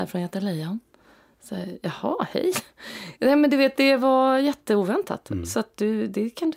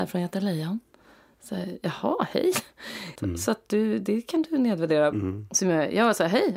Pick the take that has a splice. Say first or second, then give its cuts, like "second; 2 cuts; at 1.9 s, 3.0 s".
second; 2 cuts; at 3.2 s, 5.1 s